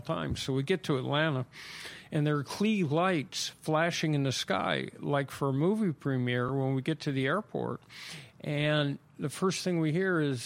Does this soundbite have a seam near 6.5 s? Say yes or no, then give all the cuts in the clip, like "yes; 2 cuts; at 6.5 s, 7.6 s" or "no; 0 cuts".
no; 0 cuts